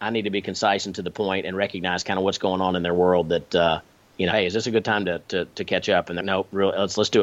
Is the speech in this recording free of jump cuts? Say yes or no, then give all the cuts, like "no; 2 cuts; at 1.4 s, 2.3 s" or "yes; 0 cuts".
no; 2 cuts; at 4.3 s, 6.2 s